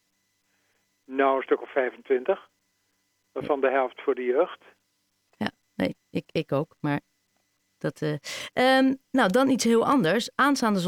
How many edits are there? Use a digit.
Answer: 2